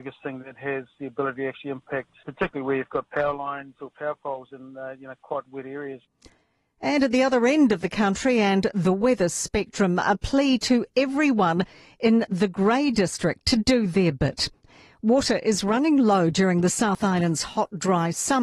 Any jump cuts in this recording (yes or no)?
no